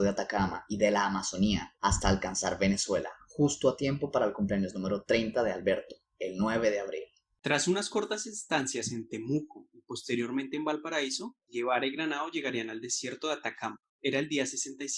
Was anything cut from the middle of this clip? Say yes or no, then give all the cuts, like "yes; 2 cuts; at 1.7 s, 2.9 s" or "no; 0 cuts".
yes; 1 cut; at 13.9 s